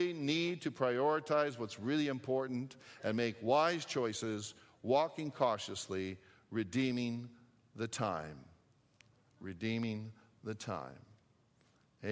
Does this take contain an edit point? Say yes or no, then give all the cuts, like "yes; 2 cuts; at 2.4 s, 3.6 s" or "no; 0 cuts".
no; 0 cuts